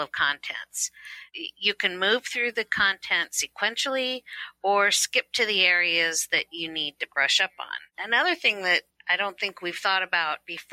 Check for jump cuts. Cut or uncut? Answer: uncut